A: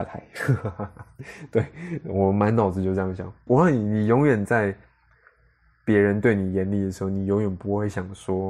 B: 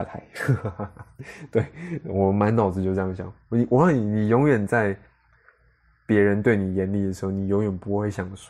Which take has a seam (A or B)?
A